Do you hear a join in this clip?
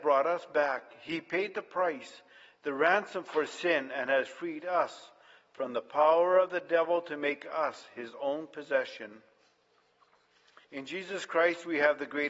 yes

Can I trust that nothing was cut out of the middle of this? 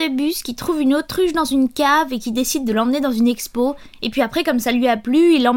yes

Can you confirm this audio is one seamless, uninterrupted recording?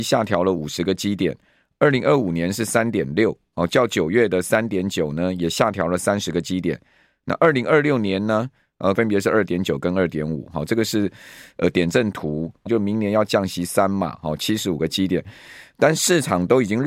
no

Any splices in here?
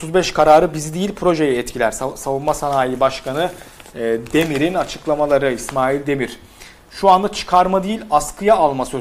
no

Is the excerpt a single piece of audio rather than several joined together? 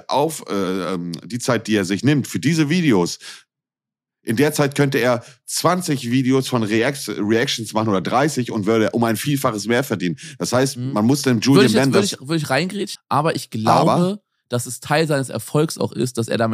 no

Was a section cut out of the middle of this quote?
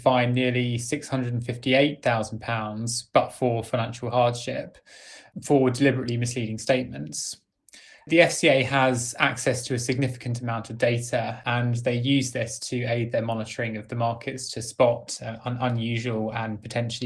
yes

